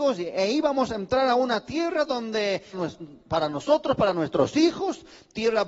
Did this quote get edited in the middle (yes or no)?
yes